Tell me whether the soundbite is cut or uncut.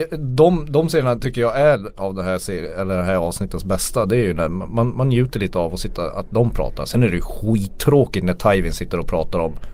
cut